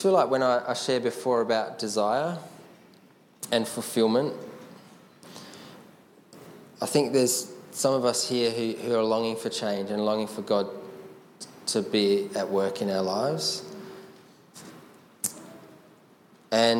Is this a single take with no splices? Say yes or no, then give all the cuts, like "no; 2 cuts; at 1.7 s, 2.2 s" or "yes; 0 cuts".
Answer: yes; 0 cuts